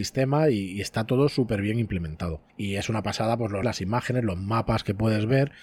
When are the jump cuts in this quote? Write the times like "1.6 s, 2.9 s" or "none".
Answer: 2.5 s, 3.6 s